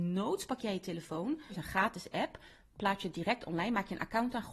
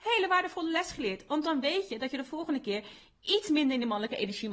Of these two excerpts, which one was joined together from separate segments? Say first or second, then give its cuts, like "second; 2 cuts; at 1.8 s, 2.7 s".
first; 1 cut; at 1.5 s